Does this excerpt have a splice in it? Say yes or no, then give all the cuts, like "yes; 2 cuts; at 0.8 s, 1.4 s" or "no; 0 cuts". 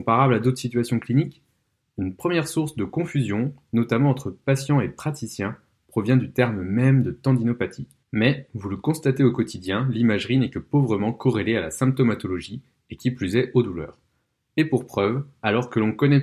yes; 1 cut; at 8.0 s